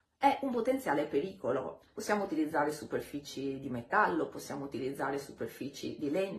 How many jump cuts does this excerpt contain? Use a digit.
1